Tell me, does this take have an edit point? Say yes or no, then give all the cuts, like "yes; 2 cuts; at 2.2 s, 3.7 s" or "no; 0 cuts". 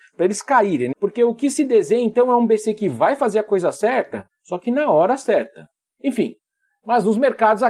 yes; 2 cuts; at 0.9 s, 6.0 s